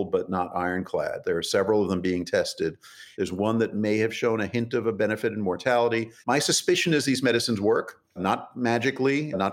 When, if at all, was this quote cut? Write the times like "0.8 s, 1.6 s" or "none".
3.1 s, 6.2 s